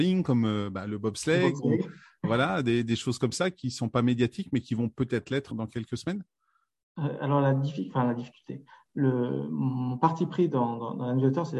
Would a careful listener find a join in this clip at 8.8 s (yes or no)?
no